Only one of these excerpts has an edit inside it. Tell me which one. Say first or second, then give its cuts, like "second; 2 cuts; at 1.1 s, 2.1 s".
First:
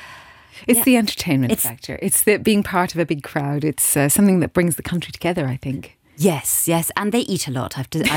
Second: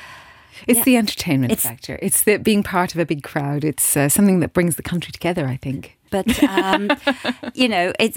second; 1 cut; at 6.1 s